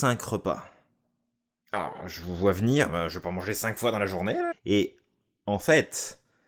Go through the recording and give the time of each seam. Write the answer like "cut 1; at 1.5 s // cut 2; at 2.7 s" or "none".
cut 1; at 4.5 s